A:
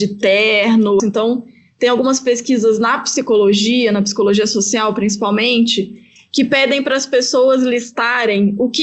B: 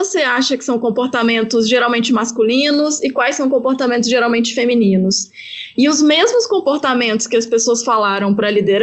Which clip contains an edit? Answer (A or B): A